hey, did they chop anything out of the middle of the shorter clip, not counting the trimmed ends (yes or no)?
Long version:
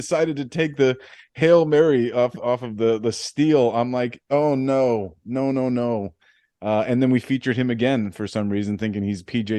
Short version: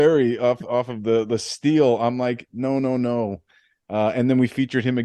yes